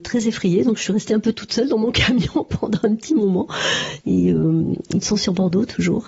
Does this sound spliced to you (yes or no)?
yes